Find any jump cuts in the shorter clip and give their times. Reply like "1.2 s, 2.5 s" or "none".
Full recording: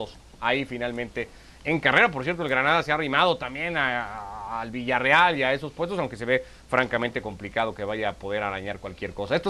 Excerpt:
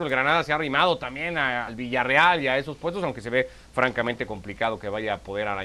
1.7 s